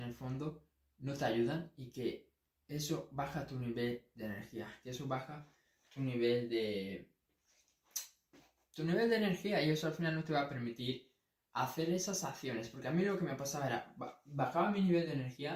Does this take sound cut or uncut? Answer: uncut